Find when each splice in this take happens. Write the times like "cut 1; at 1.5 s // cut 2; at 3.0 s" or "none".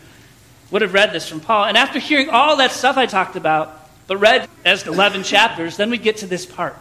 cut 1; at 3.1 s // cut 2; at 4.4 s